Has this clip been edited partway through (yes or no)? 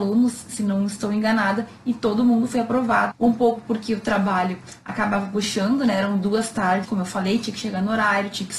yes